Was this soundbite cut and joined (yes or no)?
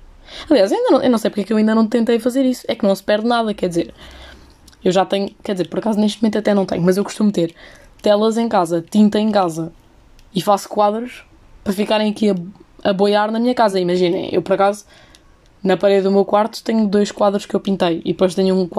no